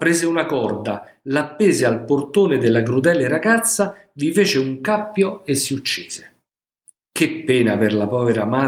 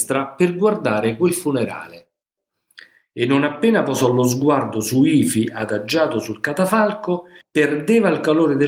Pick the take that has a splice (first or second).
second